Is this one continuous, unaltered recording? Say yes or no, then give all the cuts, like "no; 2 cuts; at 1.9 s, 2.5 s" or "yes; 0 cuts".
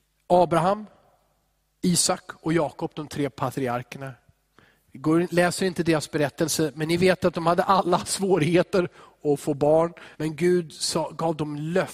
no; 1 cut; at 10.1 s